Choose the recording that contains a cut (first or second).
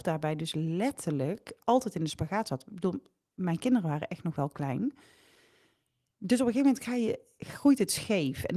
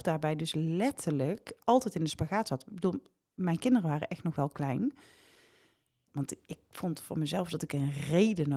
second